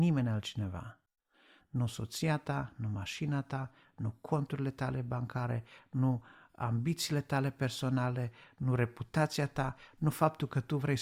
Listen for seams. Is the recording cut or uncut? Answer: uncut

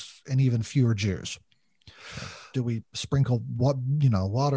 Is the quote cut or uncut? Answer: cut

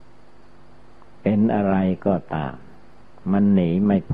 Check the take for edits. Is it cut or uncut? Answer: uncut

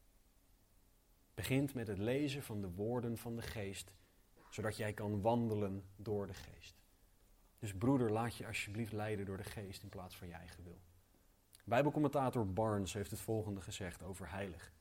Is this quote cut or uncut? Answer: cut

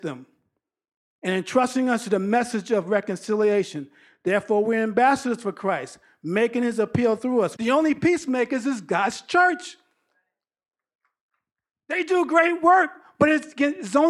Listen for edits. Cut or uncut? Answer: cut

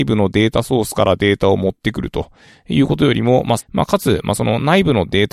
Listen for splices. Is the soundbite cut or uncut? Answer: cut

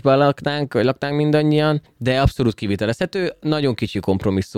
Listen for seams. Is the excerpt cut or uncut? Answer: uncut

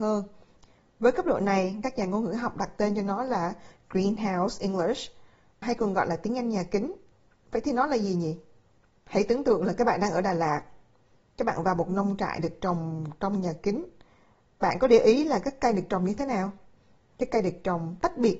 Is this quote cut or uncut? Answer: uncut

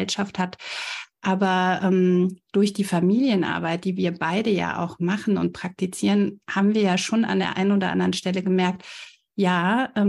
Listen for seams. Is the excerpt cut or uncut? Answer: uncut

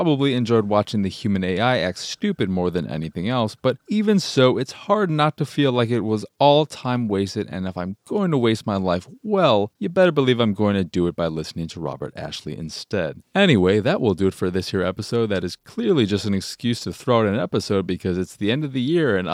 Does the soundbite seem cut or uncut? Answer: uncut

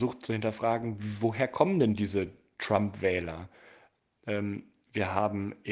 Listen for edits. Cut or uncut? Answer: cut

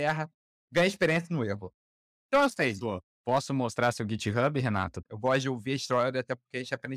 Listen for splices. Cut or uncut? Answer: cut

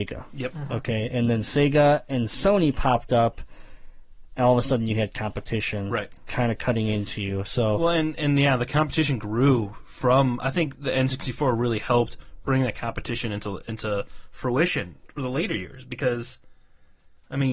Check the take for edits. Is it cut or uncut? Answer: uncut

